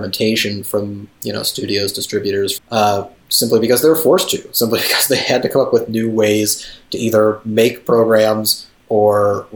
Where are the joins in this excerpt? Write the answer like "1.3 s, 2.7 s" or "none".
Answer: 2.6 s